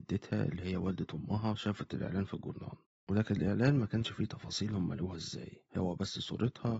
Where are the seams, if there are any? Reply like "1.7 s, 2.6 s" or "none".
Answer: 5.7 s